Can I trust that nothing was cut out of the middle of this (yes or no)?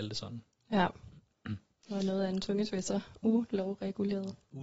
yes